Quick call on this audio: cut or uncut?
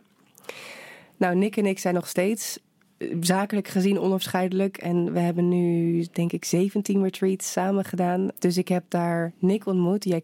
cut